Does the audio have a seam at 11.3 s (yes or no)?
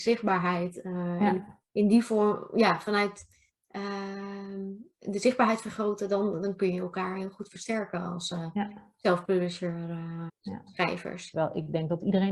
yes